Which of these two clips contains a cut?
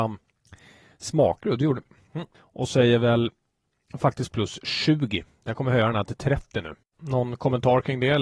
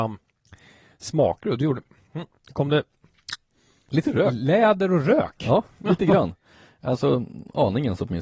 first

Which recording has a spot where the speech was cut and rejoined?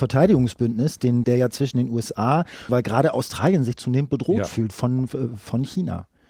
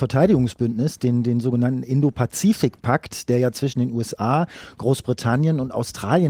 first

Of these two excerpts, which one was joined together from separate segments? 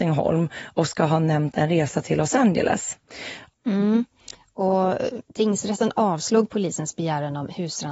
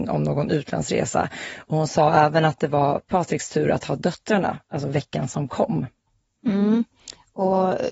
first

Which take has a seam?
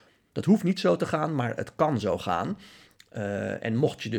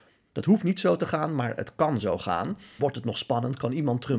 second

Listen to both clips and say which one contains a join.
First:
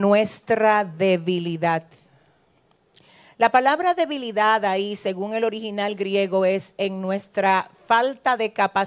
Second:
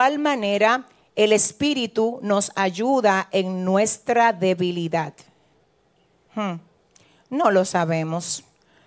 second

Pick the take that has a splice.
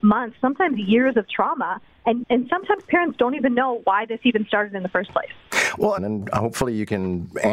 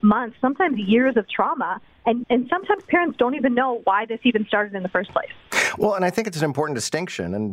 first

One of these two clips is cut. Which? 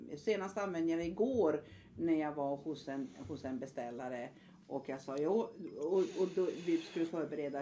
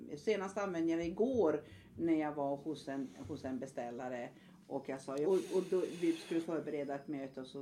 second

